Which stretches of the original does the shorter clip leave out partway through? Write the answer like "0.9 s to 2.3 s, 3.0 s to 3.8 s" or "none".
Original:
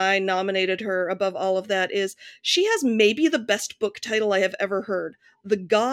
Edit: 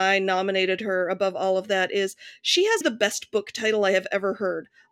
2.8 s to 3.3 s